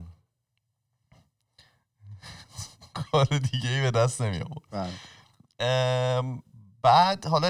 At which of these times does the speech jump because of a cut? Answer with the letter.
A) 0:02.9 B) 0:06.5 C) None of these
C